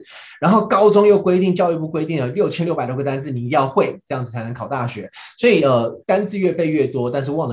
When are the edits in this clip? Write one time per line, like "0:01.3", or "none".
0:06.0